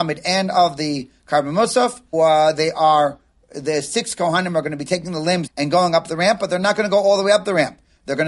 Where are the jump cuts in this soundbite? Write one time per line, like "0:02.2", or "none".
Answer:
0:02.1
0:05.5